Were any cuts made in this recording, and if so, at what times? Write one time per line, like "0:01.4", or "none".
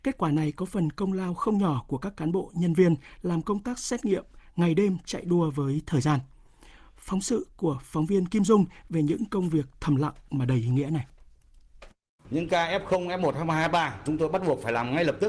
0:12.2

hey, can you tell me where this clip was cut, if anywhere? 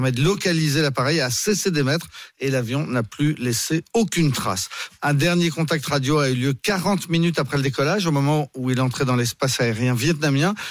0:05.0

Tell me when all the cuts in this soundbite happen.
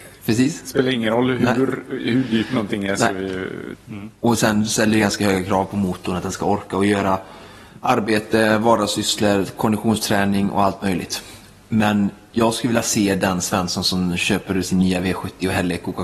0:03.7

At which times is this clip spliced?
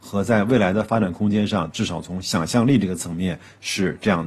0:01.7

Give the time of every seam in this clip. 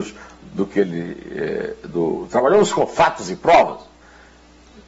none

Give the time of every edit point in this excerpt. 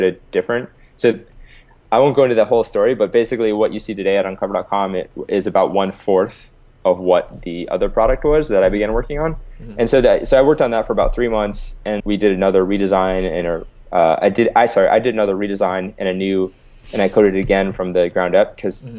0:12.0

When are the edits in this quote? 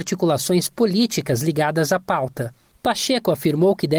none

